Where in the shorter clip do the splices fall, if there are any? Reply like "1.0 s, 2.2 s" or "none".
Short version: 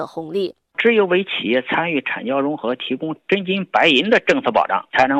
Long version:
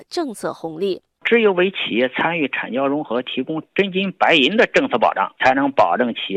none